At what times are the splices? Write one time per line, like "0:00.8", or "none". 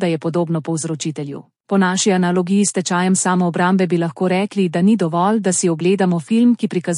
0:01.6